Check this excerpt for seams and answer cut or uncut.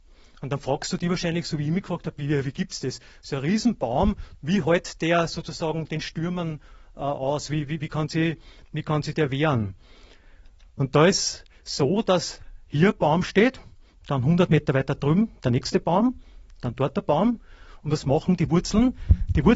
cut